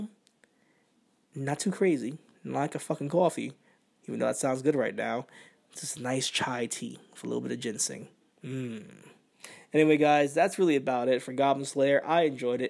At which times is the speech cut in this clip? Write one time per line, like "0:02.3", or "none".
none

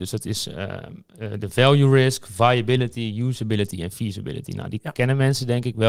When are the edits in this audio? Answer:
none

